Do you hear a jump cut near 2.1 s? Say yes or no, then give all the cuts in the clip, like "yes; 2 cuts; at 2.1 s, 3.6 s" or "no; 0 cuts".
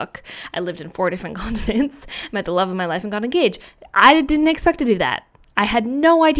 no; 0 cuts